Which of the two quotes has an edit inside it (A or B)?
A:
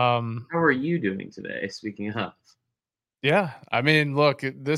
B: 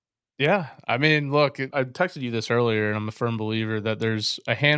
B